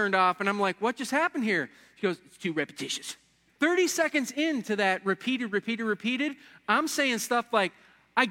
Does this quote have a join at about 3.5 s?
yes; 1 cut; at 3.5 s

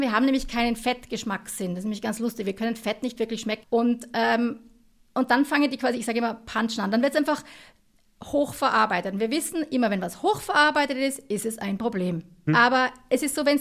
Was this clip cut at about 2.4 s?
no; 2 cuts; at 3.6 s, 12.5 s

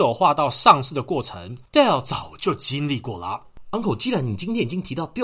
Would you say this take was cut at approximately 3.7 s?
no; 0 cuts

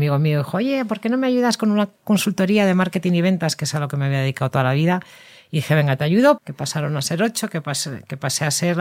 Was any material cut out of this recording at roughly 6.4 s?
yes; 1 cut; at 6.4 s

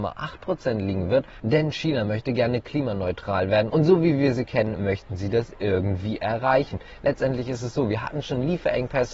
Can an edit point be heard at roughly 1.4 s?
yes; 1 cut; at 1.4 s

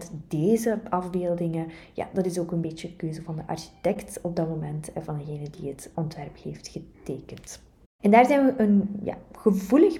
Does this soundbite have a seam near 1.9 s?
no; 1 cut; at 5.9 s

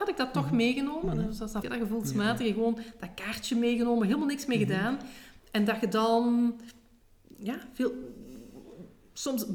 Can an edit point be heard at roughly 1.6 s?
yes; 2 cuts; at 1.6 s, 5.4 s

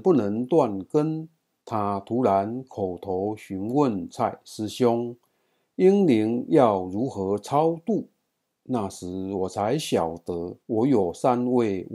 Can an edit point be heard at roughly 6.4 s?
no; 2 cuts; at 1.6 s, 10.6 s

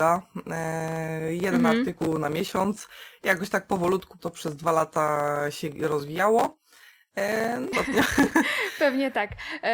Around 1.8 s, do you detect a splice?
no; 2 cuts; at 4.2 s, 7.7 s

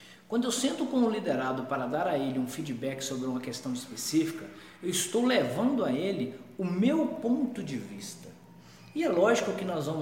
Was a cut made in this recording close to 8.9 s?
no; 0 cuts

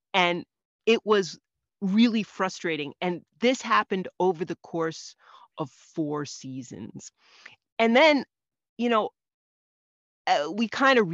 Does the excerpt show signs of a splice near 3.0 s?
no; 0 cuts

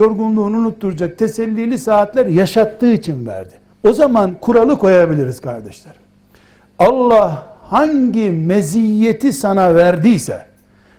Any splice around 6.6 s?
no; 1 cut; at 3.7 s

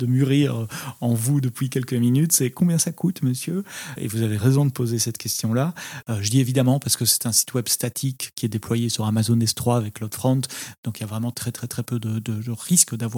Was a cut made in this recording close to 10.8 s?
no; 2 cuts; at 4.0 s, 6.0 s

